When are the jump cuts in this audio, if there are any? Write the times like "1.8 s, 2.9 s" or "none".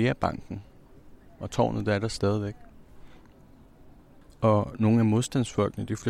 none